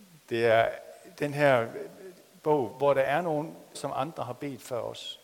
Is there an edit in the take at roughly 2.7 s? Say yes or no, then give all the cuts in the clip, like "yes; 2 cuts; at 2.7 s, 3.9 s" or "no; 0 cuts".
yes; 2 cuts; at 2.7 s, 3.7 s